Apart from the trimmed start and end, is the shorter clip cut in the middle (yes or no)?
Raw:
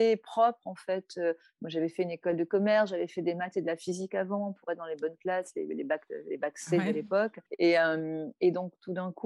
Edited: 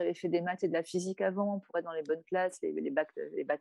no